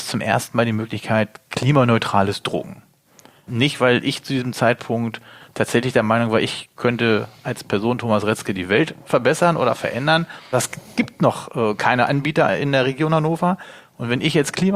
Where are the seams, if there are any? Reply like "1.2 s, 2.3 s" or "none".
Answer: 3.5 s, 10.5 s

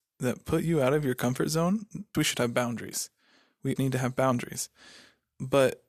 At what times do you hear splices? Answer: 2.1 s, 3.8 s

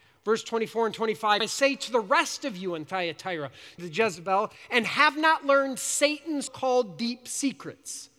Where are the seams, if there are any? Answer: 1.4 s, 3.8 s, 6.5 s

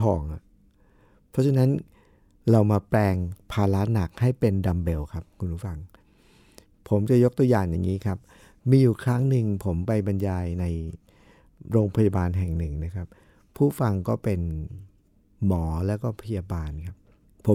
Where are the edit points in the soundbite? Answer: none

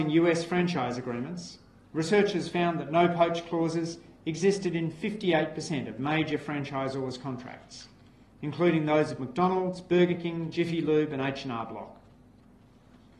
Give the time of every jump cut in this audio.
none

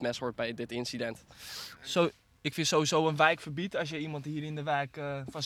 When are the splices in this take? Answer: 1.8 s

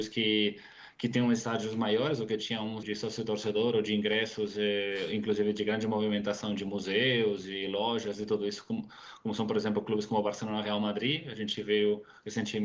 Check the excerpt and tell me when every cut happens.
2.8 s

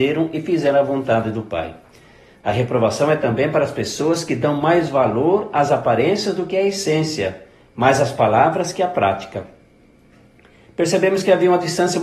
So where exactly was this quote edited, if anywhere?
2.3 s

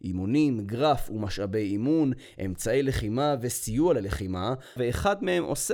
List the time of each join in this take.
4.8 s

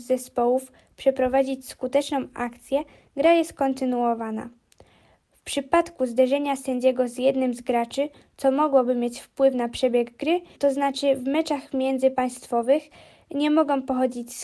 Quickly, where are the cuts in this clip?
10.5 s

